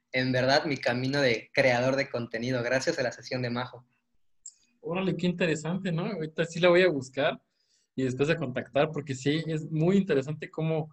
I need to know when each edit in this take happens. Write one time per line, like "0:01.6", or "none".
none